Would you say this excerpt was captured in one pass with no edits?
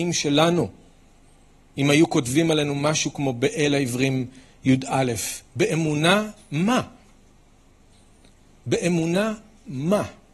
yes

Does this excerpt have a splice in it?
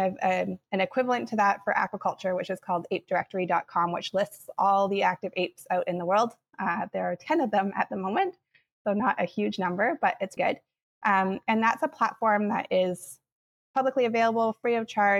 yes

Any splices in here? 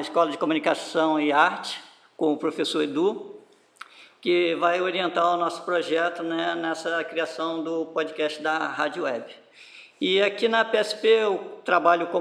no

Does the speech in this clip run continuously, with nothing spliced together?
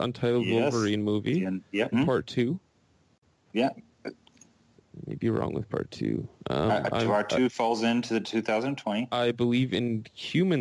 no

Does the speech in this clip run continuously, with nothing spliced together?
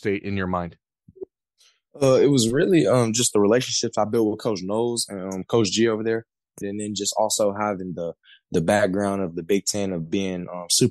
no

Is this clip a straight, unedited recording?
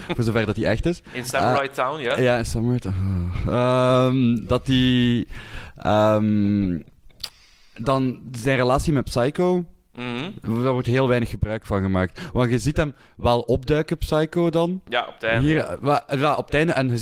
yes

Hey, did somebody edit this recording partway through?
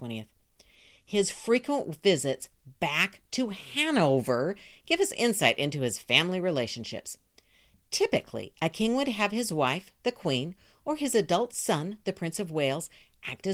no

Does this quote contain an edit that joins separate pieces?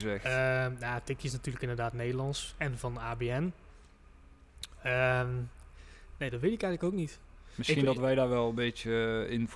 no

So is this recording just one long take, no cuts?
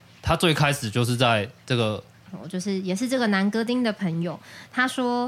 no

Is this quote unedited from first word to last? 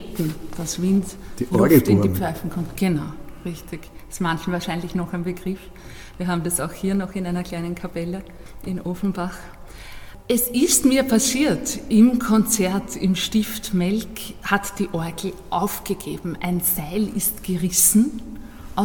yes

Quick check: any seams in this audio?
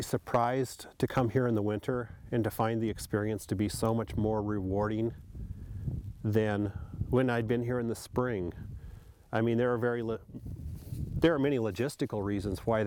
no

